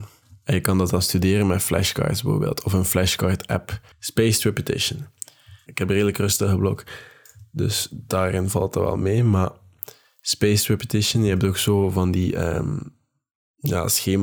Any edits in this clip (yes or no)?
yes